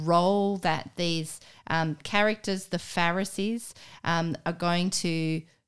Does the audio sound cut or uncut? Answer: uncut